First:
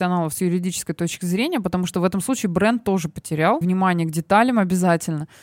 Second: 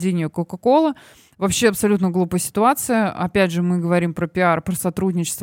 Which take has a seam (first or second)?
first